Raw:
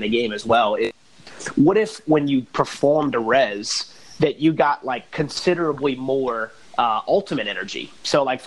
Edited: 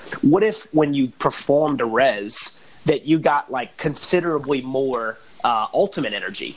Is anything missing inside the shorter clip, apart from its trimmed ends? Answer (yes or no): no